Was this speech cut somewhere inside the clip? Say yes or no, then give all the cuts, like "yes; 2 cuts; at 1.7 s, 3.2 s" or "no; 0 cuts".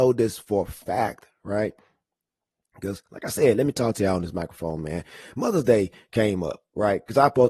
no; 0 cuts